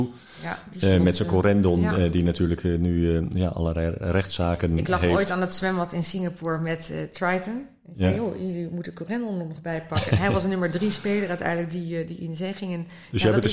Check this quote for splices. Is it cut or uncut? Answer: uncut